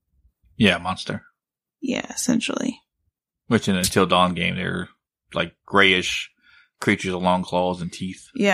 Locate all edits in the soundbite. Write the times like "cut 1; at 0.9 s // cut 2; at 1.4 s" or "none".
none